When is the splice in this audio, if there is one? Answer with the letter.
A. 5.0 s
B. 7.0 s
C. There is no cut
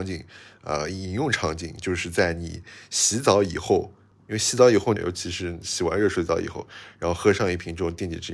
A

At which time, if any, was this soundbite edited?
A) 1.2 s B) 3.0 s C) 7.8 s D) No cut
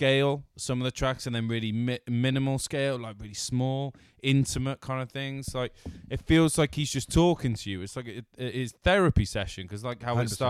D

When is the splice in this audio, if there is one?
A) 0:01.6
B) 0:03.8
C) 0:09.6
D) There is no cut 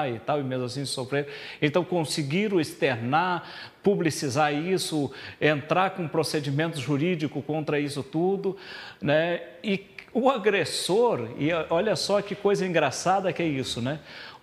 D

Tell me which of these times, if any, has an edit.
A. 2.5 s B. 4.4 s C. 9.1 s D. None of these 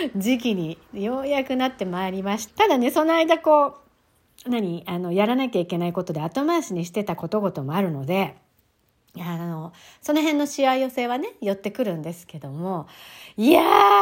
A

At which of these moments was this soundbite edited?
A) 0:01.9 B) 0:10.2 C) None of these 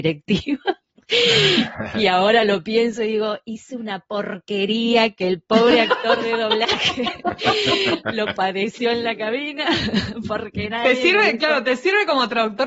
C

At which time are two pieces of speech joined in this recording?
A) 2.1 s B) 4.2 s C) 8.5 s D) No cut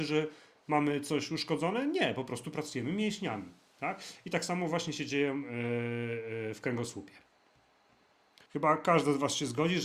C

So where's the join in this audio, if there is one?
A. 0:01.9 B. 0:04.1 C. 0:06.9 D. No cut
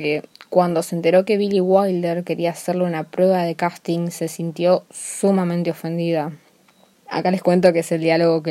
C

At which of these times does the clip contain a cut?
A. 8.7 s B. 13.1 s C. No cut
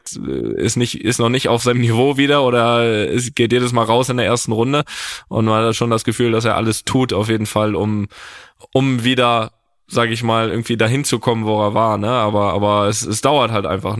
C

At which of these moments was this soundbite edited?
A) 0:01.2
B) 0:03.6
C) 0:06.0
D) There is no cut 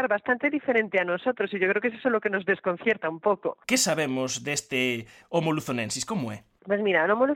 B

